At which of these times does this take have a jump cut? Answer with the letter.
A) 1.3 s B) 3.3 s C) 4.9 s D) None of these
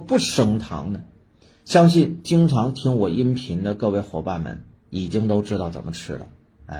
D